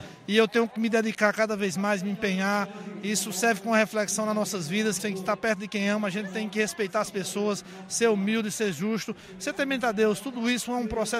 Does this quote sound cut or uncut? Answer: cut